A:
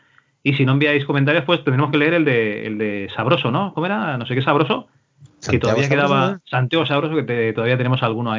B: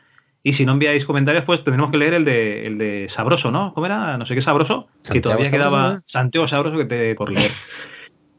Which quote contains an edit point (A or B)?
B